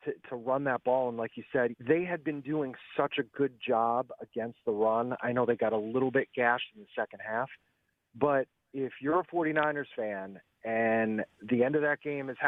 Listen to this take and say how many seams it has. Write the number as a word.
one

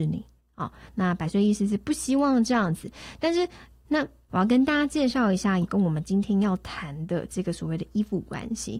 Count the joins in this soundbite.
two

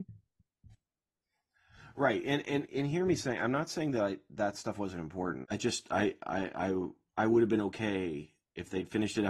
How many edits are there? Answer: one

